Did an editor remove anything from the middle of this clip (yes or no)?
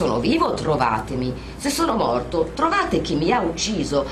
no